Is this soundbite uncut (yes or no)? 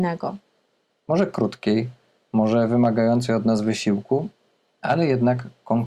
no